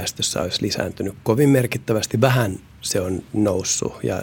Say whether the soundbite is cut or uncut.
uncut